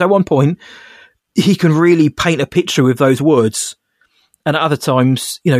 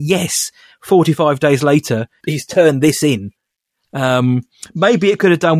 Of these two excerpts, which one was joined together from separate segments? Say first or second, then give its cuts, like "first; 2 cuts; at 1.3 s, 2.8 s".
second; 1 cut; at 2.2 s